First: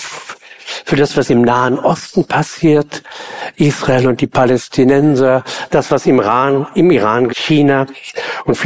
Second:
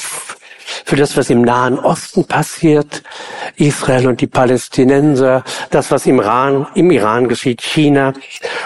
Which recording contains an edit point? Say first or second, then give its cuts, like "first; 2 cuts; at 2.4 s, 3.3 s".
first; 1 cut; at 7.3 s